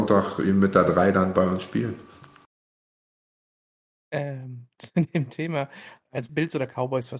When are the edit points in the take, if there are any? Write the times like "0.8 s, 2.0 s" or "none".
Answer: 6.3 s